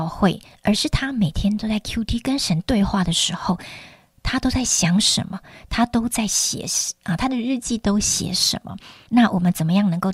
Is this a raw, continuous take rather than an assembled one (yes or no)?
no